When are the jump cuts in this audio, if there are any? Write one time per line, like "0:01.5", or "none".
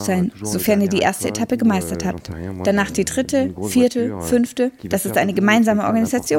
0:04.8